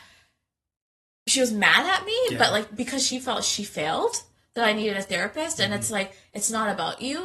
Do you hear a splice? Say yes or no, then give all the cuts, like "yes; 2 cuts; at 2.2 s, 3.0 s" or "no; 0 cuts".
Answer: no; 0 cuts